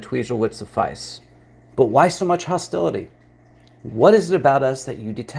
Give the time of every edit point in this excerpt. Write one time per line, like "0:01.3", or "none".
none